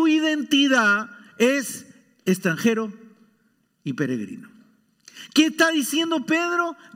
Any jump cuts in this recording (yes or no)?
no